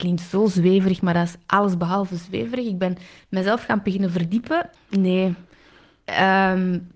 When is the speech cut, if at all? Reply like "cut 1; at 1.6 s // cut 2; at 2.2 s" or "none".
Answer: cut 1; at 4.8 s